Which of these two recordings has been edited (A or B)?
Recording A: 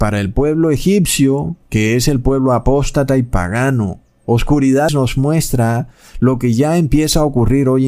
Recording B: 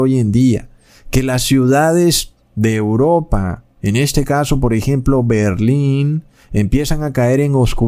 A